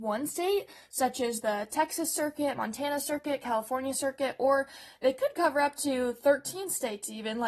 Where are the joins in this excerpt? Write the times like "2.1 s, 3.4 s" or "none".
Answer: none